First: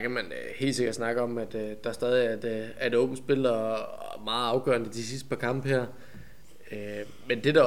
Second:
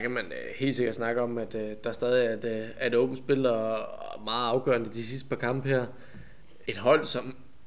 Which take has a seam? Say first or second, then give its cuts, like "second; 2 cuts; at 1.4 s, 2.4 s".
second; 1 cut; at 6.7 s